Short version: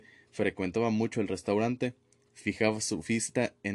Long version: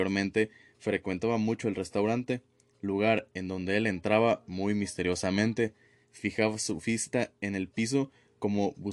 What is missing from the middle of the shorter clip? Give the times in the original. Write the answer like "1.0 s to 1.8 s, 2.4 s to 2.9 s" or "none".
2.7 s to 6.0 s

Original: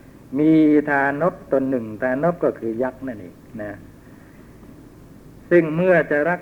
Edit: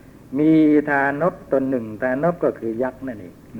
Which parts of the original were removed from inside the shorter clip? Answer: none

